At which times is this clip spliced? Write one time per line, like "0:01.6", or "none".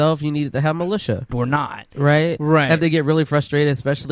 0:01.3
0:02.4